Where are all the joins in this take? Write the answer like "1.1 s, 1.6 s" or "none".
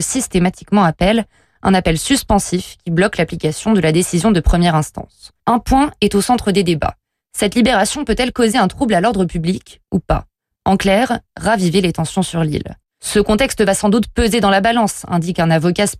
5.4 s